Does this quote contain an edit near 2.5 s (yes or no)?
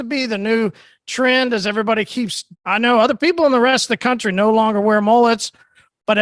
yes